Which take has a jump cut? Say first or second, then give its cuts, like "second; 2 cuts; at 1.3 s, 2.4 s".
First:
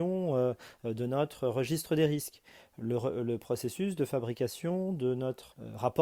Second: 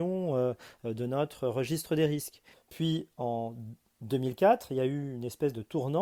second; 1 cut; at 2.5 s